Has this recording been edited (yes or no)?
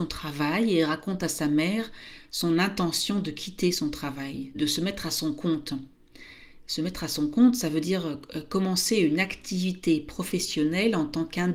yes